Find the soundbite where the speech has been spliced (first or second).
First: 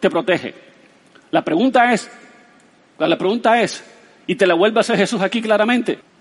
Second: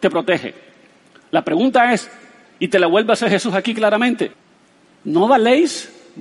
second